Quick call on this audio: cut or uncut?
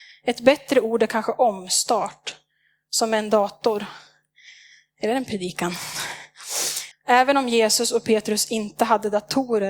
cut